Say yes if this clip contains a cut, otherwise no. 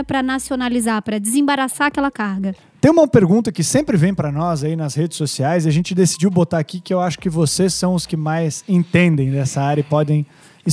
yes